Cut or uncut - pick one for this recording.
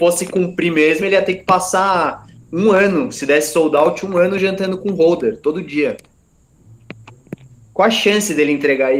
uncut